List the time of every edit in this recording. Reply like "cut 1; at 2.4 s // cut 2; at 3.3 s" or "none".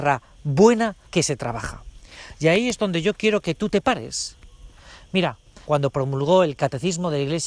cut 1; at 1.0 s // cut 2; at 5.6 s